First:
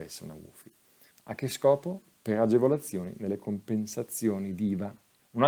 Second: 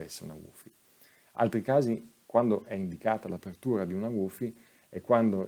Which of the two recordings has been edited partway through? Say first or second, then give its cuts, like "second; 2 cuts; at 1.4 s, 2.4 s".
first; 1 cut; at 1.1 s